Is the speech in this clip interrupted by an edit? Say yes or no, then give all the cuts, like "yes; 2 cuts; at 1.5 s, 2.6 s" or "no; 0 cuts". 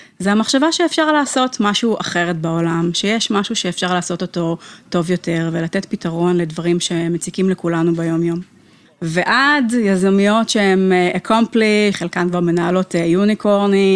yes; 2 cuts; at 8.9 s, 11.9 s